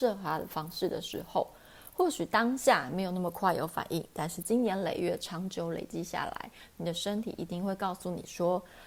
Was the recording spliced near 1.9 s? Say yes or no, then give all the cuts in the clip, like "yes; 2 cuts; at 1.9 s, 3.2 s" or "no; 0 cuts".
no; 0 cuts